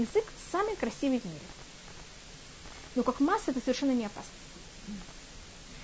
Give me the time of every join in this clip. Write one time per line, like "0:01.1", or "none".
0:02.9